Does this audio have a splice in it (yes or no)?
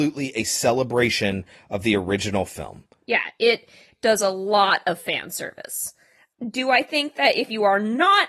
no